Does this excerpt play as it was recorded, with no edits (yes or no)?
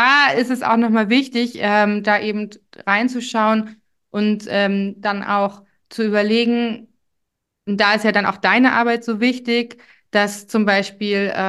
yes